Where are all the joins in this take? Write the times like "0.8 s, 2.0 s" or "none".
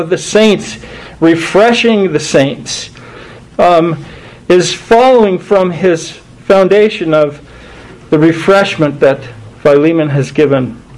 3.4 s